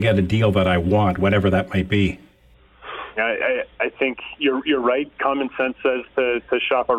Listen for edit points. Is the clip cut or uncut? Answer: cut